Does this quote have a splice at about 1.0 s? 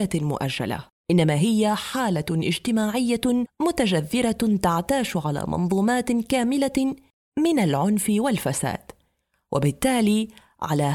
yes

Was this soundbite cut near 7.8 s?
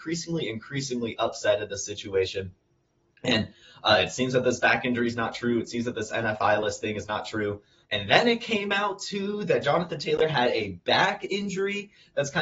yes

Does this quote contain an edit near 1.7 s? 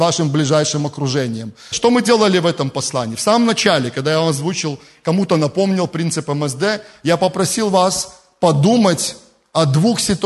yes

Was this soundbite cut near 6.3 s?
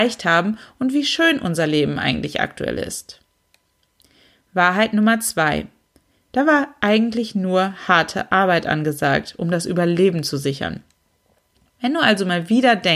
yes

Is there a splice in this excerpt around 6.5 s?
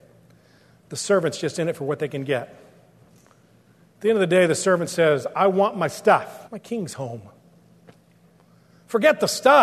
yes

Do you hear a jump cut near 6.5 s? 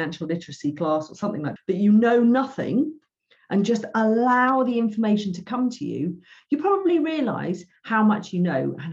no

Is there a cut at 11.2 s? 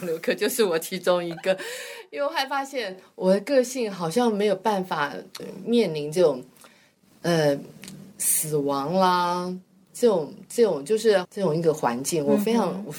yes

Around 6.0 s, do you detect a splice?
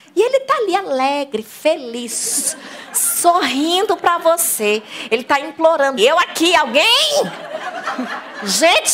yes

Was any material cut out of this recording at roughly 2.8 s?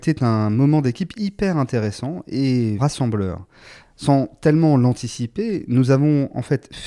yes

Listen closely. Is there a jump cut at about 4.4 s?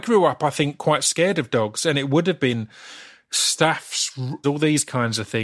yes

